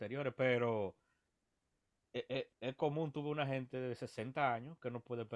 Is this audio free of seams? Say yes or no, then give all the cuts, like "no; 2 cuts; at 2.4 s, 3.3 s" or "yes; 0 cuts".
yes; 0 cuts